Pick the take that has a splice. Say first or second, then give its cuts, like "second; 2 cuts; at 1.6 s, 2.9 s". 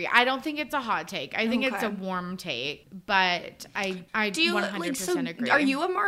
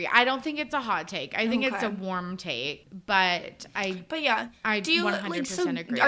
first; 1 cut; at 4.1 s